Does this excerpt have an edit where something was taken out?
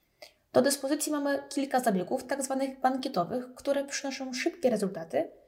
no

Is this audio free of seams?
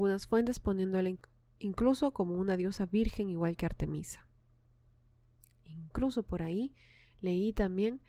yes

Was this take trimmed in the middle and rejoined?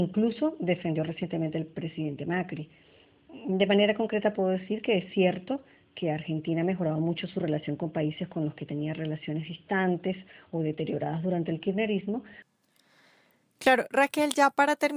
no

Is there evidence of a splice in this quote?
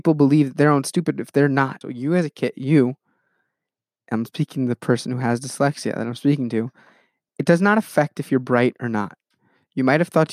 yes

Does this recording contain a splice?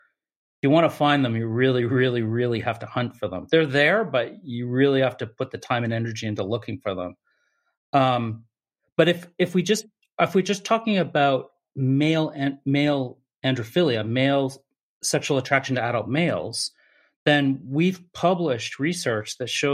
no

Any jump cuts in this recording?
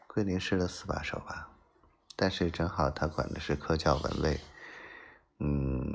no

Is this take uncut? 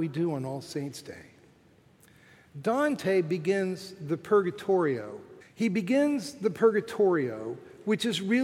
no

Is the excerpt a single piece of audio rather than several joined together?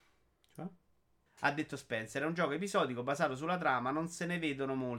no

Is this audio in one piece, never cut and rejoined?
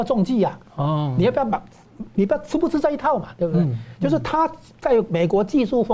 yes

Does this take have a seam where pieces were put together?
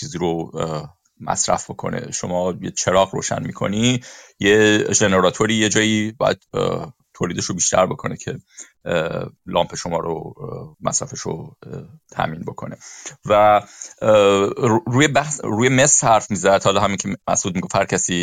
yes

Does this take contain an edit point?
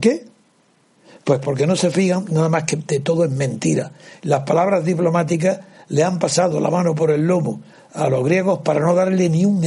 no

